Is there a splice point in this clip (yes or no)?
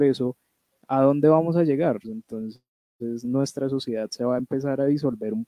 yes